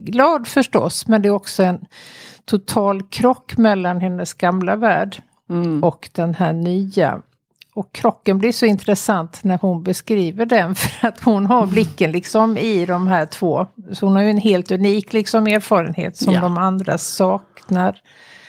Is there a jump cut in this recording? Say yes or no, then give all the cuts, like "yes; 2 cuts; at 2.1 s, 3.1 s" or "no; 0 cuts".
no; 0 cuts